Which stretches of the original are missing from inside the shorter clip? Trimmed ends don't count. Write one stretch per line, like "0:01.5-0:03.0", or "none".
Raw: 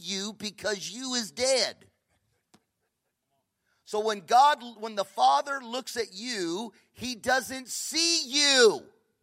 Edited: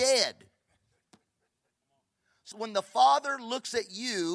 0:03.9-0:04.7